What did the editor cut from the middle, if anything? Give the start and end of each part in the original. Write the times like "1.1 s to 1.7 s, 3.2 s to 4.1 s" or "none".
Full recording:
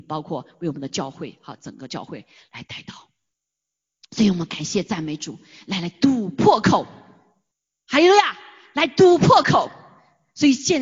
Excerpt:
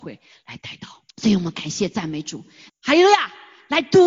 3.1 s to 4.0 s, 5.6 s to 7.7 s